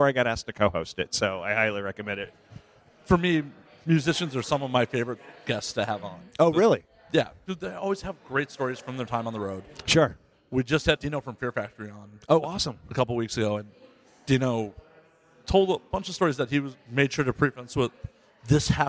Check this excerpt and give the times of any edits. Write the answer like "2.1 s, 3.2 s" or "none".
11.0 s